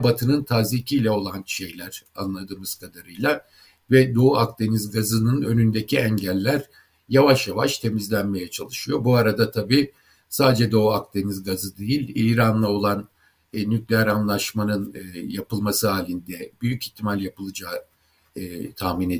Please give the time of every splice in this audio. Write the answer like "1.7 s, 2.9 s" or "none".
none

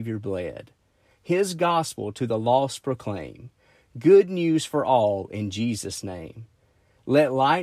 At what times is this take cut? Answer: none

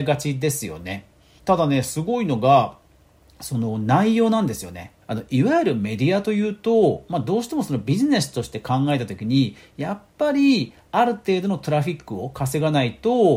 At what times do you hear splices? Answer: 1.4 s, 5.0 s

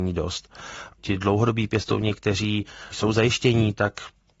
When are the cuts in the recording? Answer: 1.0 s

